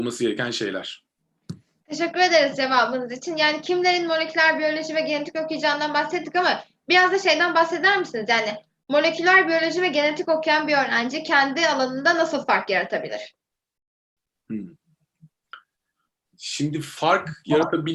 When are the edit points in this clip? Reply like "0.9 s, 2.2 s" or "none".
none